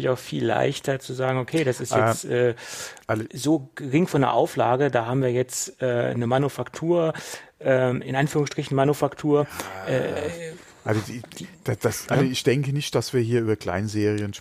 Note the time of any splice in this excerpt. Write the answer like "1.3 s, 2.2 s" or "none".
none